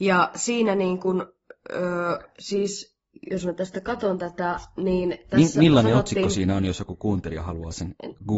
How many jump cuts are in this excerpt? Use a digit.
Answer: 0